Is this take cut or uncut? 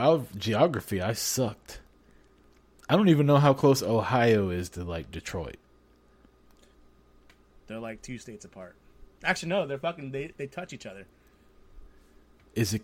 uncut